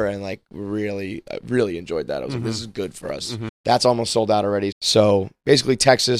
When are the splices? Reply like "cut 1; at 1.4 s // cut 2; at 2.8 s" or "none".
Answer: cut 1; at 3.5 s // cut 2; at 4.7 s